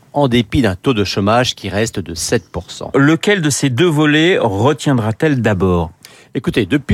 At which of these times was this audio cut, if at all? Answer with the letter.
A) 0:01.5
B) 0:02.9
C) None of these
B